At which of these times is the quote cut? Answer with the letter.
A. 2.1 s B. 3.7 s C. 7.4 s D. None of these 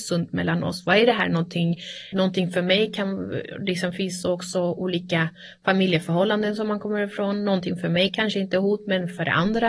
A